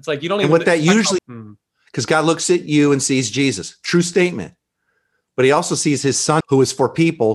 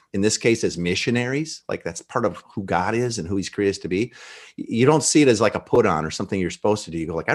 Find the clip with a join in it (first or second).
first